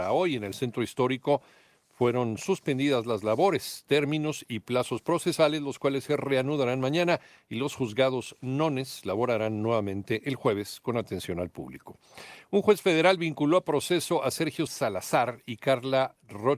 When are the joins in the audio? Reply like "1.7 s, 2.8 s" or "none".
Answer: 14.7 s